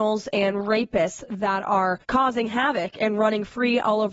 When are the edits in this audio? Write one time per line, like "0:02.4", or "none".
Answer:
0:02.0